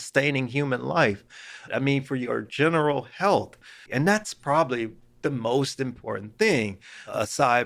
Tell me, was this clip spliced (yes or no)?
yes